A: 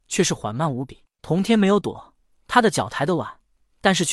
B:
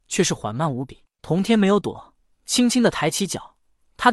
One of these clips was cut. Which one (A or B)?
A